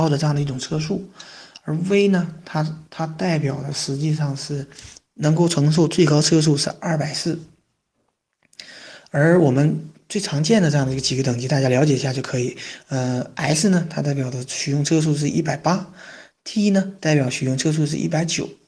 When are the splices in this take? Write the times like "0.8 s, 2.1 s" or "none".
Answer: none